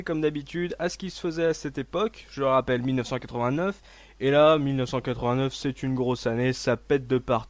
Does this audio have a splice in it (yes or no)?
no